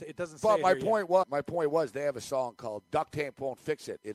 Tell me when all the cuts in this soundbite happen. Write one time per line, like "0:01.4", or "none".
0:01.2
0:02.8